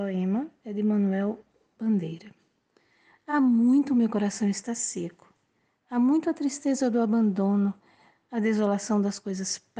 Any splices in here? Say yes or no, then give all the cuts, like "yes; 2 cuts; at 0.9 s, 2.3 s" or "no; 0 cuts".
no; 0 cuts